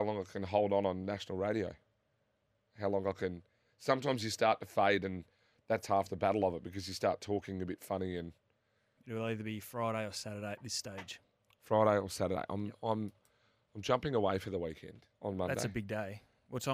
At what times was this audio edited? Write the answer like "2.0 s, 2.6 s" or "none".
9.0 s, 15.2 s